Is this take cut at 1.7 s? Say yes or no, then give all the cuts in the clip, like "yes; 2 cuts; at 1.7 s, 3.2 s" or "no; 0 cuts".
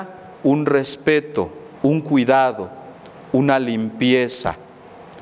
yes; 1 cut; at 1.7 s